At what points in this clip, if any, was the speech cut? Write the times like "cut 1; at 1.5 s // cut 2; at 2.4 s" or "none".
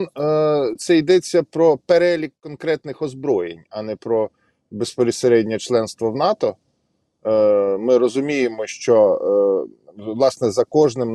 none